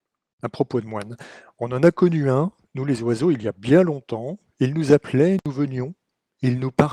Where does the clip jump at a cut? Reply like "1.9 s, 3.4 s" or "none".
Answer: none